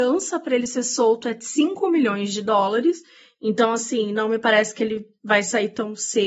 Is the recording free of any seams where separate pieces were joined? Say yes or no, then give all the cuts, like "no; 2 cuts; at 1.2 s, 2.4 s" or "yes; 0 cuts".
yes; 0 cuts